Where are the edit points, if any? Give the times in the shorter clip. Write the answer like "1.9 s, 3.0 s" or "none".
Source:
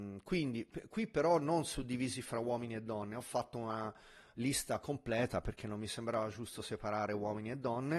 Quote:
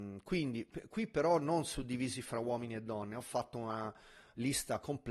none

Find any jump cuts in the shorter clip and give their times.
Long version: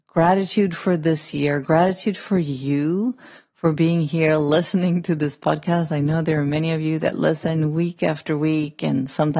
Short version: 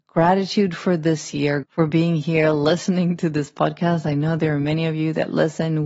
1.6 s

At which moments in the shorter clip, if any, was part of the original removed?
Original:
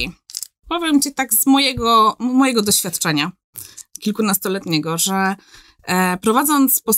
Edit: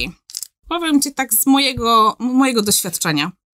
none

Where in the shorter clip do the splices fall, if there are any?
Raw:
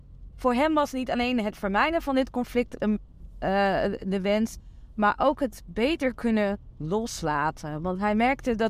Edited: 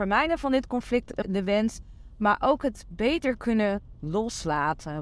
1.2 s

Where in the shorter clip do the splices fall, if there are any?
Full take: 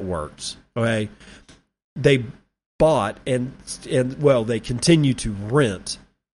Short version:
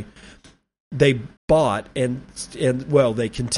1.4 s

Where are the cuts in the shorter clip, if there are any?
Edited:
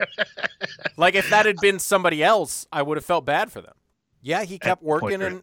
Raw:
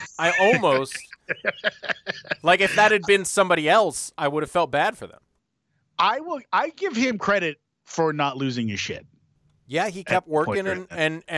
4.1 s

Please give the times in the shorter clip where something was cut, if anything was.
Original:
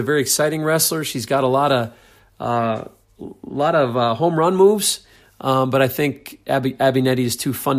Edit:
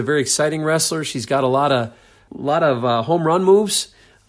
2.3 s

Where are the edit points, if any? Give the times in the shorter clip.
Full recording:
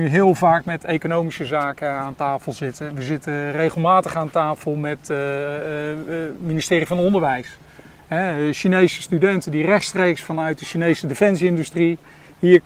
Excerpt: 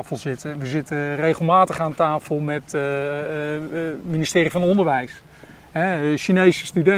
none

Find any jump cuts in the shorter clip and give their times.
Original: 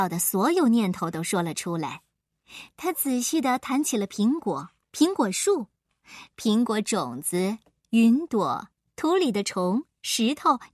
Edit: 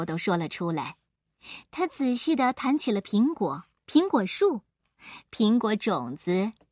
none

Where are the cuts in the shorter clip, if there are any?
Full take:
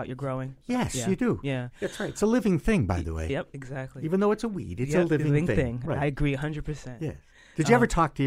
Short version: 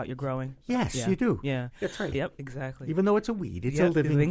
2.1 s

